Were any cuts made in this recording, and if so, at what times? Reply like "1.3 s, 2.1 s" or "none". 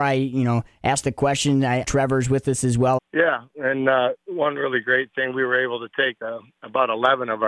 1.8 s, 3.0 s